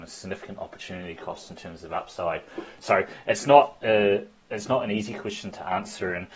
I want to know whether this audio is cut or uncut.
uncut